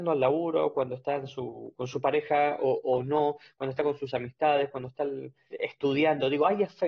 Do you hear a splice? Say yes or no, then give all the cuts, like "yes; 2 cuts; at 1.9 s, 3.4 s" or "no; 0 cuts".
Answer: yes; 1 cut; at 5.5 s